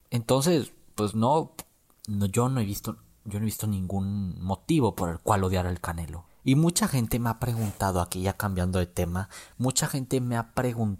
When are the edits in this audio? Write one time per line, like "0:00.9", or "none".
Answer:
0:06.3